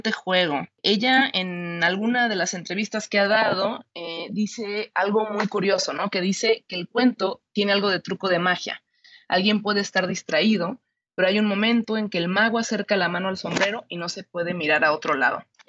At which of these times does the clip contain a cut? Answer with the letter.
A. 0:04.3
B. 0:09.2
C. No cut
C